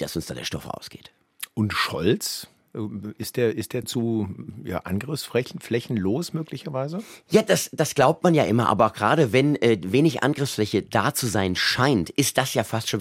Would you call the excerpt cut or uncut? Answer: cut